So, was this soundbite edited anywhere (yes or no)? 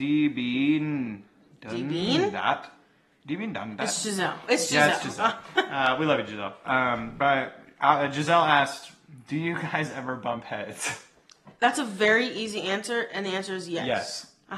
no